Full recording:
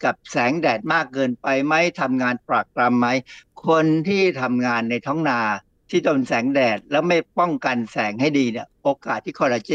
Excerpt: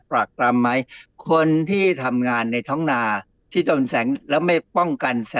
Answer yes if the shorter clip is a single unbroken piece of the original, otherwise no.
no